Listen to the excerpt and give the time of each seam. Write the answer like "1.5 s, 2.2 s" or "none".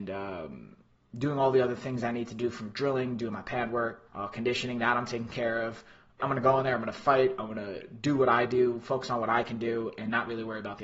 4.1 s, 6.2 s

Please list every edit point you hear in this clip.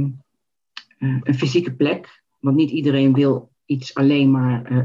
3.6 s

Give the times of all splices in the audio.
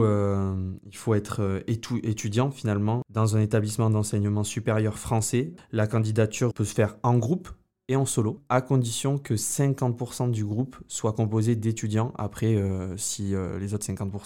6.5 s

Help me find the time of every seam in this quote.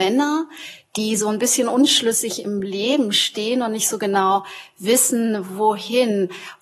none

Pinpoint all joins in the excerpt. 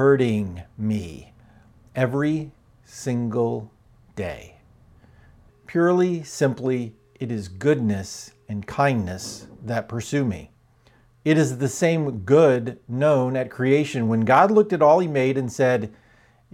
5.5 s, 11.2 s

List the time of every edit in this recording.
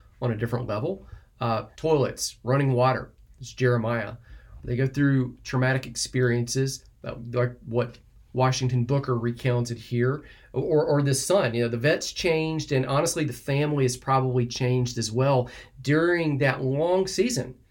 1.7 s

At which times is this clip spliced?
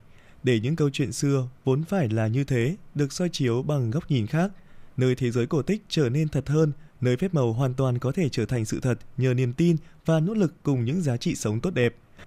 6.9 s

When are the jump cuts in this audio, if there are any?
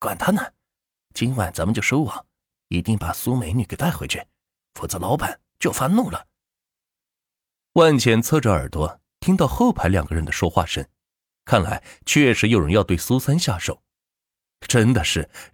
none

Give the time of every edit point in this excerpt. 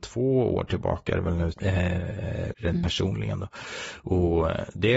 1.5 s, 2.5 s

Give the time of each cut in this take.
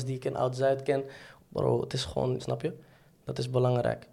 1.4 s, 2.4 s

